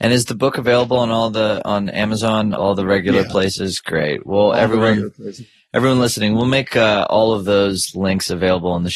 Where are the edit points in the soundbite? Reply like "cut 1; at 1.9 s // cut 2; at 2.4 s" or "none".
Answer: none